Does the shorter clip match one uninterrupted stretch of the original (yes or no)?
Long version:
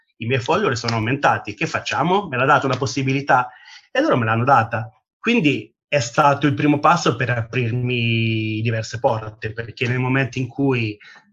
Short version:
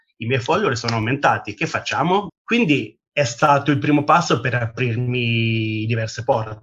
no